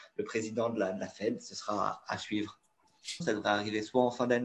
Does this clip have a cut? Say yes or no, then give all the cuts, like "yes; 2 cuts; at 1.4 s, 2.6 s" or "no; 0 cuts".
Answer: yes; 1 cut; at 3.2 s